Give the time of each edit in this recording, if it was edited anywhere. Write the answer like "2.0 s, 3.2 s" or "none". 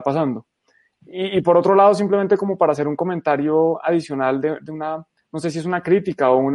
none